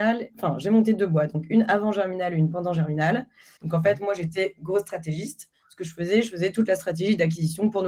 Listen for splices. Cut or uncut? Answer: cut